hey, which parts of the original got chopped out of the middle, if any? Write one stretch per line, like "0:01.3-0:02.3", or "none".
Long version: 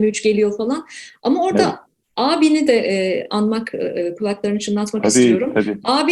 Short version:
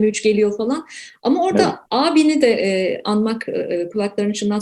0:01.8-0:02.1